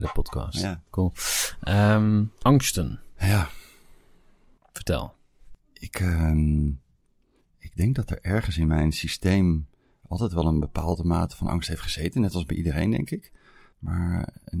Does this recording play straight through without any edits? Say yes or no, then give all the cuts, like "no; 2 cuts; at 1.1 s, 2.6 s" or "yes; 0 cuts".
yes; 0 cuts